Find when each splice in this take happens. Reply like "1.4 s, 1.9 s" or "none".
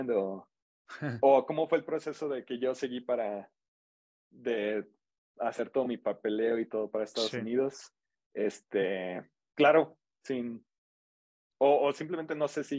none